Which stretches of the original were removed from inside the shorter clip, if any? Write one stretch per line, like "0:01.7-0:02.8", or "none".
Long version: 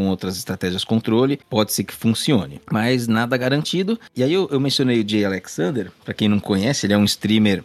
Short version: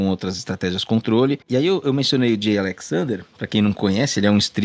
0:01.4-0:04.1

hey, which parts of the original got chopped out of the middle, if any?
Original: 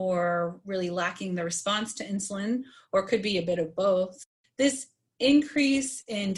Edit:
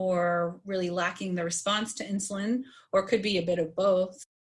none

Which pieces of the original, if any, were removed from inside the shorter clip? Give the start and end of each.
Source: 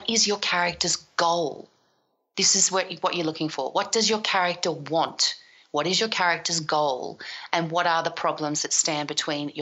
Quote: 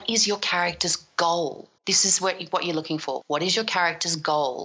0:01.8-0:02.3
0:03.7-0:05.7

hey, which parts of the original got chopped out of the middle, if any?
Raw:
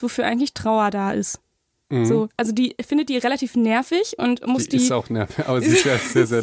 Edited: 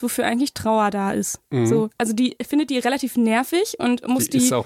0:01.5-0:01.8

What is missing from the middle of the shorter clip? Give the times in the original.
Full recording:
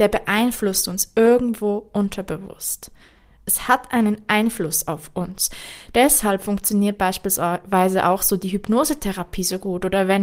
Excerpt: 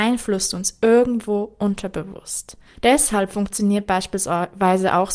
0:03.1-0:05.8

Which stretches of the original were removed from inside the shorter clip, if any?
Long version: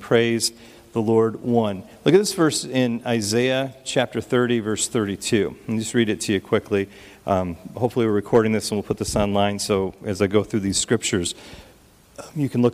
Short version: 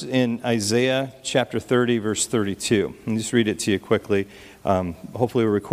none

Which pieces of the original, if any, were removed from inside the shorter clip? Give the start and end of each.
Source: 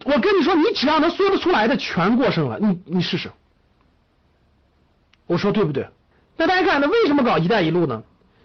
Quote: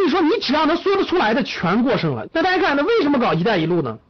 0:02.6-0:06.3

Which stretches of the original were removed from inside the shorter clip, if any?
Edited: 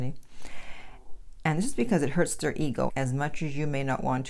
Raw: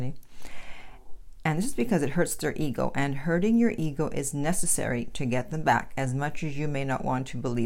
0:02.9-0:05.9

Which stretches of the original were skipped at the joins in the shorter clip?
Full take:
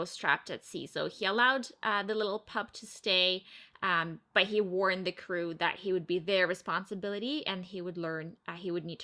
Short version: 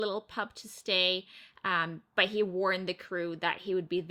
none

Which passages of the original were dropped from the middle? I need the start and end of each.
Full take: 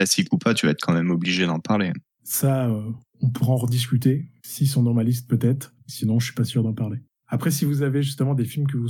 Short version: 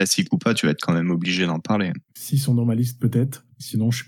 0:02.1-0:04.4

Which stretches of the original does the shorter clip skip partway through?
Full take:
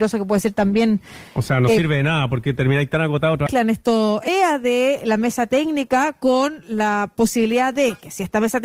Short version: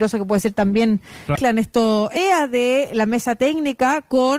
0:01.3-0:03.4

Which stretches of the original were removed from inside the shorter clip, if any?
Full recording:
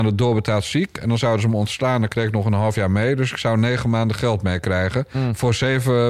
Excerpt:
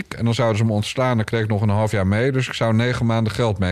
none

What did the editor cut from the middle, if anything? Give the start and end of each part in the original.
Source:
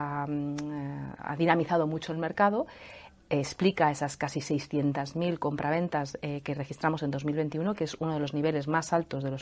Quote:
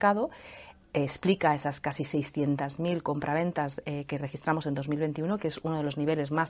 none

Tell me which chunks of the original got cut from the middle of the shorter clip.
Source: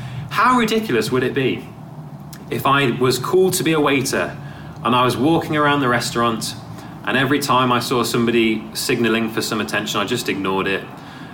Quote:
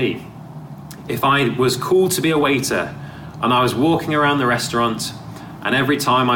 none

